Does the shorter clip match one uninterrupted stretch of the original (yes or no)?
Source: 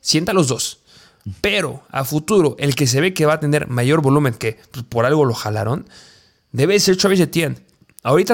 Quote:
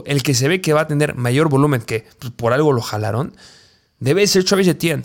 yes